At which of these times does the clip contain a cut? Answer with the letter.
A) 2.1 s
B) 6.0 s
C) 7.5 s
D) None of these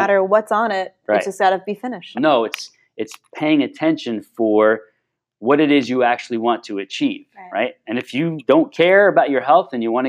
A